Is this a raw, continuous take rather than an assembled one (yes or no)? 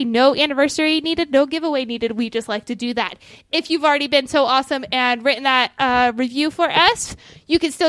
yes